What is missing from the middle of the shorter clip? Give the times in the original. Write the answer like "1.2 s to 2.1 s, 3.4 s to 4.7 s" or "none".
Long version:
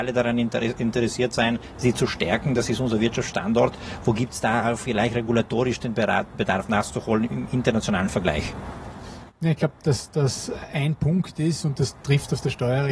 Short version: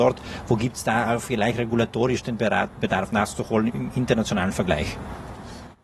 none